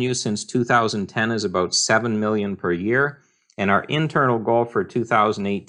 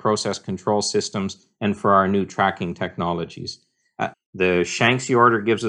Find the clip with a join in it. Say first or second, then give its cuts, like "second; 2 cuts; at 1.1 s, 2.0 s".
second; 1 cut; at 4.1 s